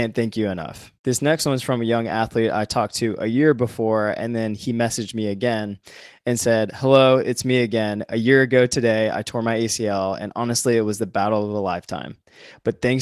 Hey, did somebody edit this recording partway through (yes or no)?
yes